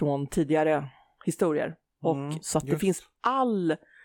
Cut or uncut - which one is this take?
cut